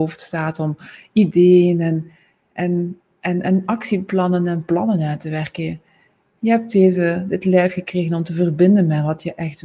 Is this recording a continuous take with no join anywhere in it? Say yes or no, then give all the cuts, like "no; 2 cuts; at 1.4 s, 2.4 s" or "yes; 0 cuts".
yes; 0 cuts